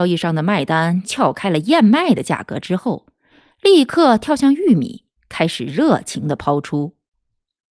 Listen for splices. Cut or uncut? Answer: uncut